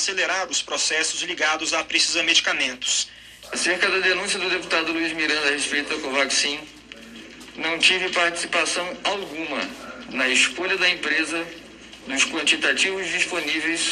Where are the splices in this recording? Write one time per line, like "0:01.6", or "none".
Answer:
0:03.4
0:12.0